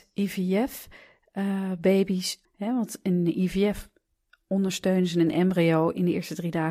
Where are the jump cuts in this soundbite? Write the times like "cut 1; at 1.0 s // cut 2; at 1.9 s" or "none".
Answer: cut 1; at 2.4 s